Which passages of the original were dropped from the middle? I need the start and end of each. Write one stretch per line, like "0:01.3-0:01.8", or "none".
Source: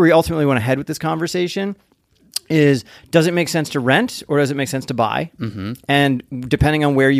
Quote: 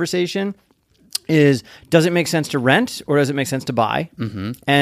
none